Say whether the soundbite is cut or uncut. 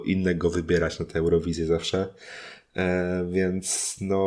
uncut